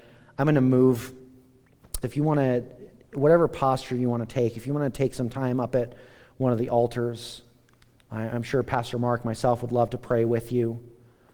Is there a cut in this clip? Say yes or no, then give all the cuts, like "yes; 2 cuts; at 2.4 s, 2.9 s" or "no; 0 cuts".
yes; 1 cut; at 2.0 s